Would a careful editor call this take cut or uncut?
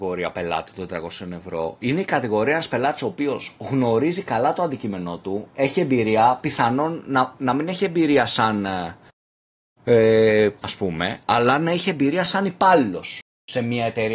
cut